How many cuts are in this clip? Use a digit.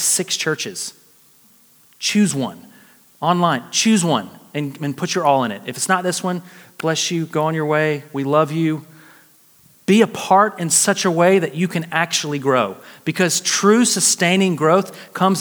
0